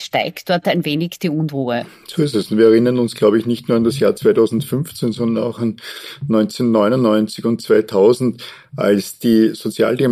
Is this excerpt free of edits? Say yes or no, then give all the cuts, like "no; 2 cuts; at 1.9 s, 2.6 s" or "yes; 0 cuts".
yes; 0 cuts